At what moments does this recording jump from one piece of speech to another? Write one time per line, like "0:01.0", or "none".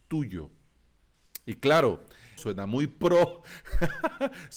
0:02.4